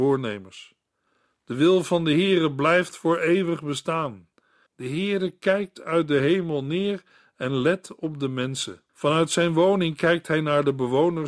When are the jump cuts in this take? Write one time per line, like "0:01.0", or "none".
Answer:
0:04.7
0:08.9